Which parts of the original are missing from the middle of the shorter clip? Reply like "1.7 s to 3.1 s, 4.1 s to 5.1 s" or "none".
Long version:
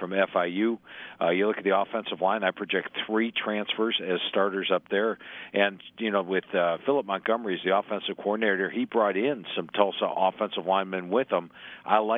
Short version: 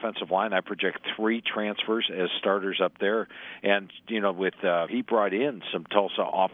6.8 s to 8.7 s